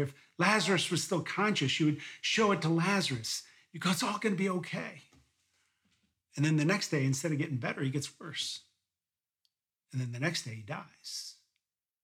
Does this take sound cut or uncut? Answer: uncut